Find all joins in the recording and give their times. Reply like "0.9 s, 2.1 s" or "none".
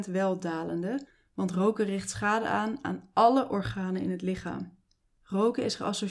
none